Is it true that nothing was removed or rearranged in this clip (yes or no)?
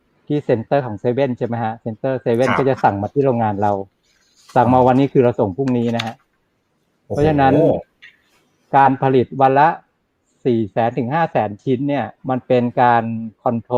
no